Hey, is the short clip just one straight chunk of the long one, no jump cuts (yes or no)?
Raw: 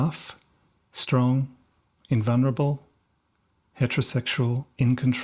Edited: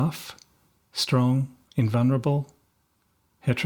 no